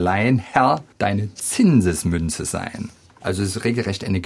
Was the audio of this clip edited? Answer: yes; 2 cuts; at 0.9 s, 3.2 s

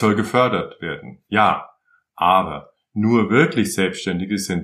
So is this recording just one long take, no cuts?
yes; 0 cuts

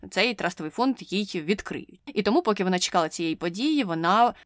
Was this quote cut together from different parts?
no; 0 cuts

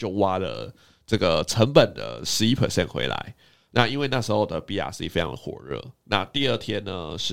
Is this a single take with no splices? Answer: yes; 0 cuts

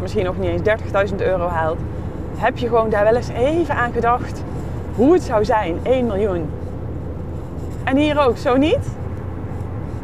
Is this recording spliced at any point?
no; 0 cuts

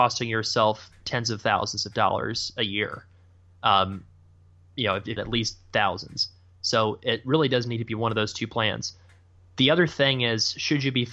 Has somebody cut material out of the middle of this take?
yes; 1 cut; at 5.2 s

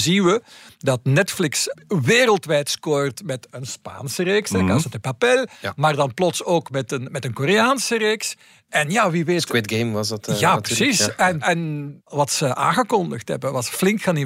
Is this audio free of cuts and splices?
no; 1 cut; at 11.4 s

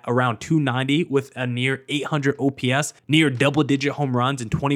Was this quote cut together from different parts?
yes; 1 cut; at 3.0 s

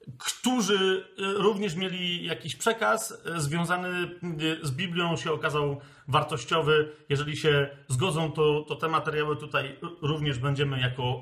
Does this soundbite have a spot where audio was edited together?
no; 0 cuts

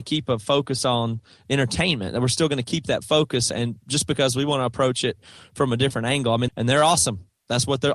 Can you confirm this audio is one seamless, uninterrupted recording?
no; 1 cut; at 6.5 s

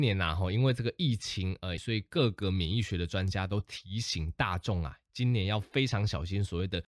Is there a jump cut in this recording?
yes; 1 cut; at 1.8 s

